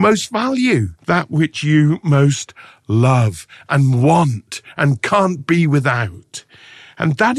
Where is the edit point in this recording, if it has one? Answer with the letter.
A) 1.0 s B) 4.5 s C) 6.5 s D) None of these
A